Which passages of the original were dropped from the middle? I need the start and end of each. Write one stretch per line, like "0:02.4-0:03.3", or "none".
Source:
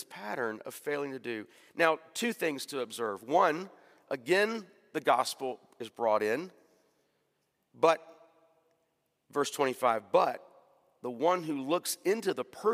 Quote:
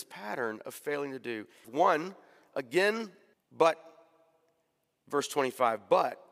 0:01.6-0:03.2
0:04.9-0:07.6